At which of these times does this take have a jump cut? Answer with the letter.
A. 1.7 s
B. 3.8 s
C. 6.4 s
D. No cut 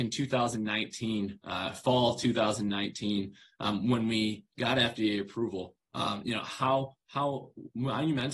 D